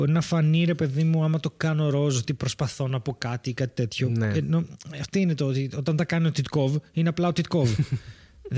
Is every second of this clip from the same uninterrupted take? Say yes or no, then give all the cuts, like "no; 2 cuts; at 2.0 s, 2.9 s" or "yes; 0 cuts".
yes; 0 cuts